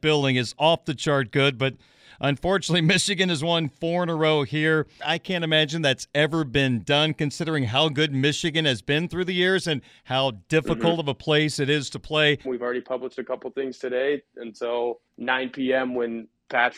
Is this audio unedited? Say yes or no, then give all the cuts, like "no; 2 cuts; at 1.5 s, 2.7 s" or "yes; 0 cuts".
no; 3 cuts; at 5.0 s, 12.4 s, 15.1 s